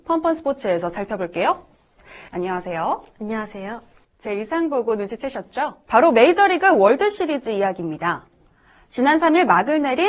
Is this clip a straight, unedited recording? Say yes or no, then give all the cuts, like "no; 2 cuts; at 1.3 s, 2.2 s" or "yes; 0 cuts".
no; 3 cuts; at 2.3 s, 4.0 s, 5.9 s